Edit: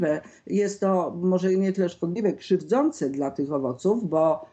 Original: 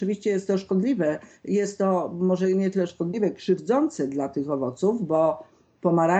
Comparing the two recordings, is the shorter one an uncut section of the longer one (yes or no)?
yes